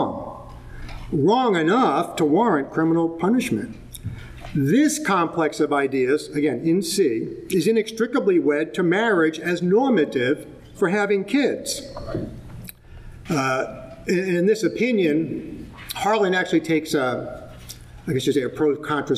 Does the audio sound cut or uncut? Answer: cut